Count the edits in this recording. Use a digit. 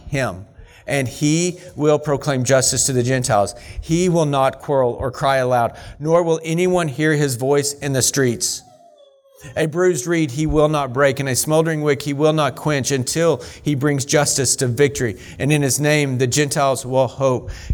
0